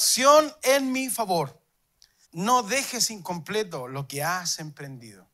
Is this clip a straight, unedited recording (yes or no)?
no